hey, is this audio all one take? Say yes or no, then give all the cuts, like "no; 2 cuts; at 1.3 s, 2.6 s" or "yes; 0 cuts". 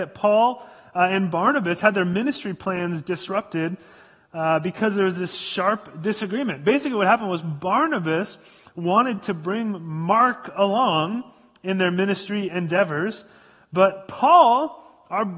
yes; 0 cuts